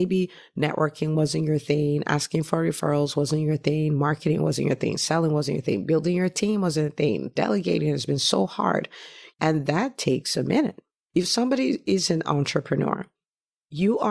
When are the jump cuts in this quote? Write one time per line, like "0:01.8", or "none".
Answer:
0:09.3
0:11.1